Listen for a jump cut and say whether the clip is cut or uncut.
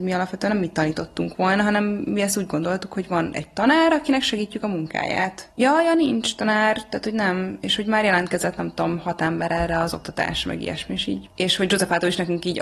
cut